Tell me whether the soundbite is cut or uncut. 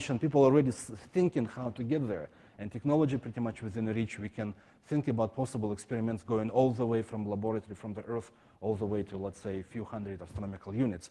uncut